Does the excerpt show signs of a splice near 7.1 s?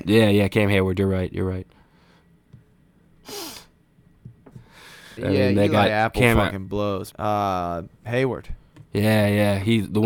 yes; 2 cuts; at 5.2 s, 7.1 s

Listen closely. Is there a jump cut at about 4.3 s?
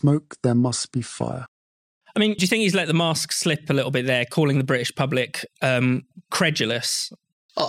no; 1 cut; at 2.4 s

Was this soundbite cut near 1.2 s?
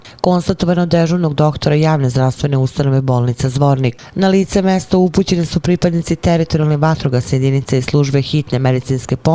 no; 1 cut; at 4.1 s

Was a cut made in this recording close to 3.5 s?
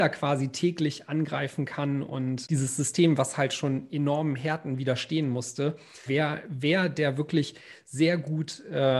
no; 1 cut; at 6.1 s

